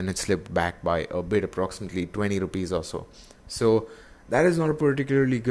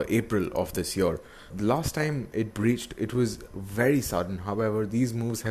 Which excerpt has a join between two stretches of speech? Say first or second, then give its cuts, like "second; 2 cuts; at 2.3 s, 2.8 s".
second; 1 cut; at 1.5 s